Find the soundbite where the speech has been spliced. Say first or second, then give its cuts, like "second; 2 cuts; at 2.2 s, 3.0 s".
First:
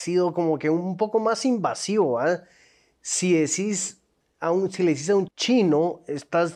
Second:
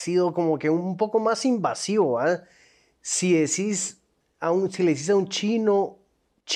first; 1 cut; at 5.3 s